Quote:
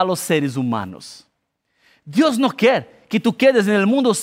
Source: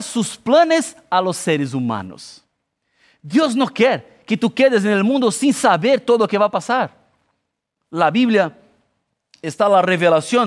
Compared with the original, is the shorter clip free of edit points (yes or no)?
yes